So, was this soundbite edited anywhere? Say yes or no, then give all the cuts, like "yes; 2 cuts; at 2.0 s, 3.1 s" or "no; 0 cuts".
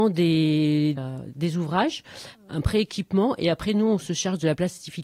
yes; 2 cuts; at 1.0 s, 2.3 s